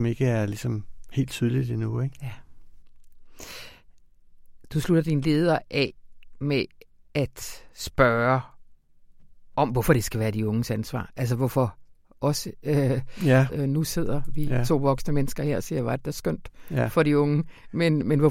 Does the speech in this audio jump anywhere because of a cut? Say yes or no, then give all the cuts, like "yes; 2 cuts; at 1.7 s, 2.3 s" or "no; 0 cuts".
yes; 1 cut; at 13.5 s